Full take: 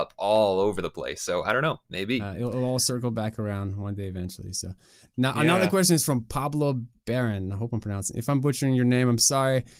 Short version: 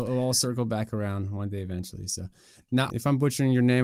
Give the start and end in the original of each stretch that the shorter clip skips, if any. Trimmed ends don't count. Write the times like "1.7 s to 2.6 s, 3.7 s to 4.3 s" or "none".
5.4 s to 8.1 s